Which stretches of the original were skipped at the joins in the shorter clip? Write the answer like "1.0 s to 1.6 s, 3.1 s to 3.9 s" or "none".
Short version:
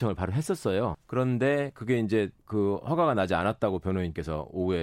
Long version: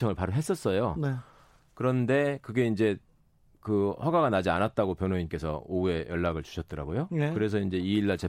0.9 s to 1.6 s, 3.1 s to 3.5 s